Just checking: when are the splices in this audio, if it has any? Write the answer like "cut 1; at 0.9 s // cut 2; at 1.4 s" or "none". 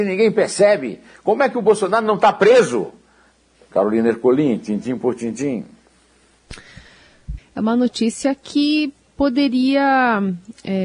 cut 1; at 3.5 s // cut 2; at 7.4 s